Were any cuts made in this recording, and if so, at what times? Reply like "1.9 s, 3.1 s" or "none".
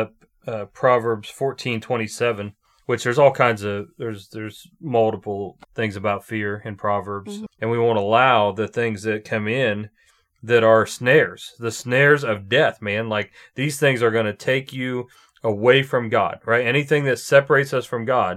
5.6 s, 7.6 s